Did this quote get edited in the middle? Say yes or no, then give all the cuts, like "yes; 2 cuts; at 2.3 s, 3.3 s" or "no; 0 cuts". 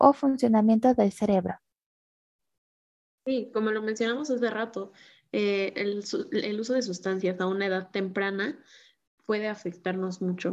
no; 0 cuts